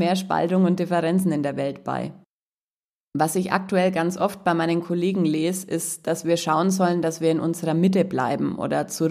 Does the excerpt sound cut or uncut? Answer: uncut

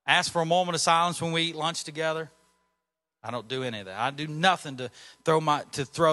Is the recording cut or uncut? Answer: uncut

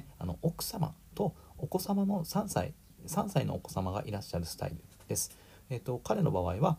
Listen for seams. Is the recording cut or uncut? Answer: uncut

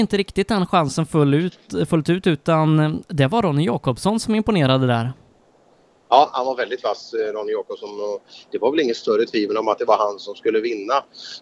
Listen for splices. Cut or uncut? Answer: uncut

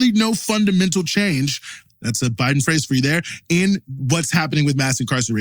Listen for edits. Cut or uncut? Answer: cut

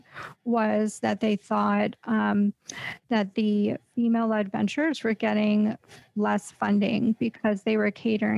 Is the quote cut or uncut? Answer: uncut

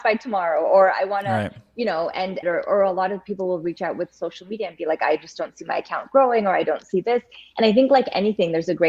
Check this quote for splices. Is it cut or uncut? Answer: cut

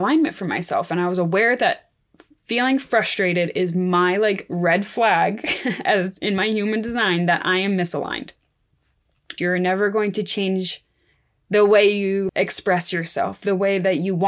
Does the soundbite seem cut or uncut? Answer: cut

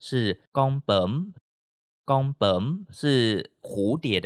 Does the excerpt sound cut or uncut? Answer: uncut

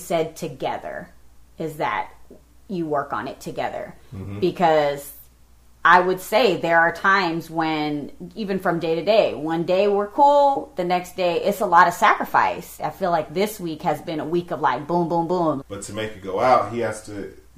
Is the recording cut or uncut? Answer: cut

